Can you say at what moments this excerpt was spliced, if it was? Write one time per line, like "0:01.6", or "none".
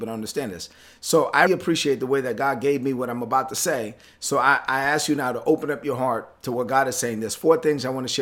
0:01.5